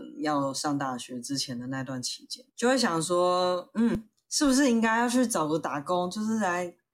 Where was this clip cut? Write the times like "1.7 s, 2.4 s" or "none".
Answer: 2.5 s